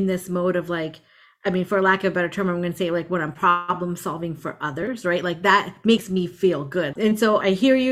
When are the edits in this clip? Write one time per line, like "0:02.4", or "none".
0:06.9